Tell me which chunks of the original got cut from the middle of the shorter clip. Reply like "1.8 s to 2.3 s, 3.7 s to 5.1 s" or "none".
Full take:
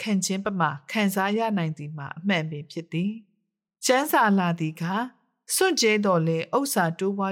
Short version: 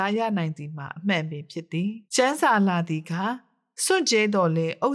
3.3 s to 3.8 s